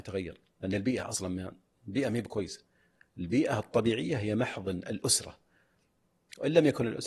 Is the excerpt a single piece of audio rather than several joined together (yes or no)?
yes